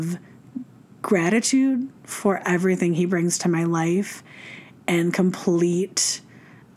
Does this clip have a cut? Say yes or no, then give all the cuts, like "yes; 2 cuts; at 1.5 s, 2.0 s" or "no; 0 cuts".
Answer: no; 0 cuts